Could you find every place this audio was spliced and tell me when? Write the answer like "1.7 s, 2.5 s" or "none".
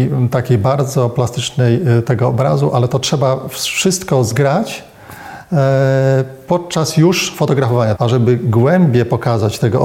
8.0 s